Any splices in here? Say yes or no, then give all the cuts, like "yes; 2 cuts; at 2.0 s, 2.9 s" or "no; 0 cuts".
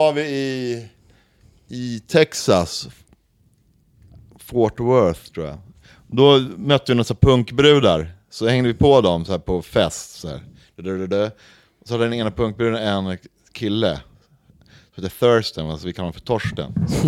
no; 0 cuts